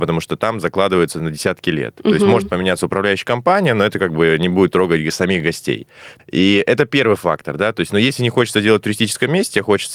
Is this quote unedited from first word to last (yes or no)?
no